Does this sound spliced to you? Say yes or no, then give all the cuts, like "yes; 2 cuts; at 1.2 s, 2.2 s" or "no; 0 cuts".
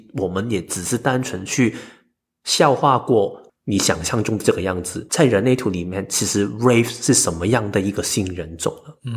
yes; 2 cuts; at 3.5 s, 5.1 s